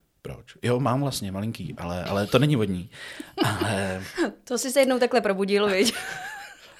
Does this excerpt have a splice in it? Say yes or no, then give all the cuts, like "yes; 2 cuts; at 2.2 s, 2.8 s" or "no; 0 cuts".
no; 0 cuts